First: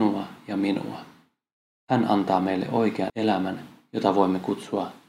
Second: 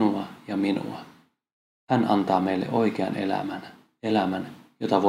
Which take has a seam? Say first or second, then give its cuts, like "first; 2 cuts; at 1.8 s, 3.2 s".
first; 1 cut; at 3.1 s